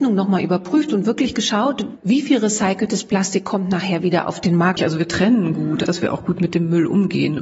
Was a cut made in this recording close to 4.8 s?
yes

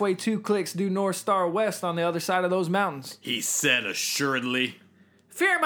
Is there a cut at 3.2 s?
no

